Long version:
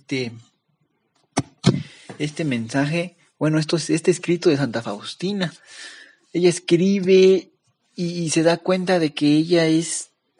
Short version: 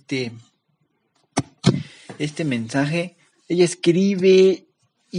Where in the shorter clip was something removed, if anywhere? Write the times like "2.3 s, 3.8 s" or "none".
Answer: 3.3 s